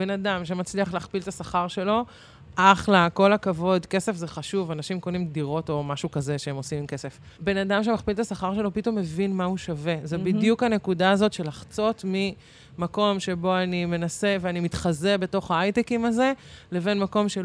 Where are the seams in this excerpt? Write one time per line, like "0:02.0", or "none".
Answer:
0:07.3

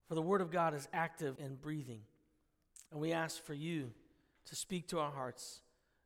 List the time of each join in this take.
0:01.4

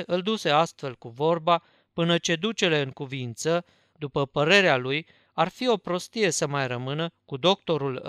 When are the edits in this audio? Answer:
0:03.9

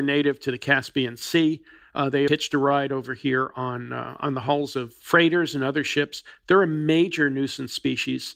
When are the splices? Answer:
0:02.3

